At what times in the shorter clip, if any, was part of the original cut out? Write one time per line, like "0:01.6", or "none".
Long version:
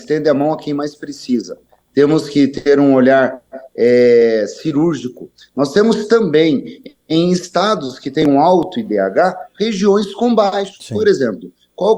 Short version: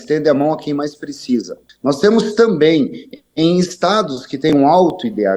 0:01.7